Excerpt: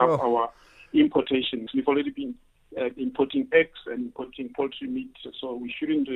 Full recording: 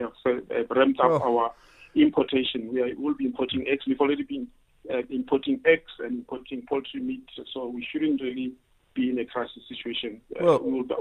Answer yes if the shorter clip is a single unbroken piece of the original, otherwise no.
no